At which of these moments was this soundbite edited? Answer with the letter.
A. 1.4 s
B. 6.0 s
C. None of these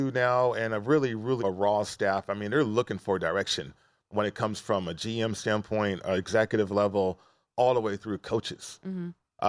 A